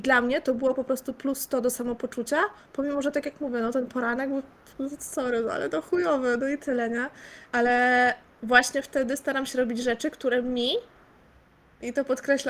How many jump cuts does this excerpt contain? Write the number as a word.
zero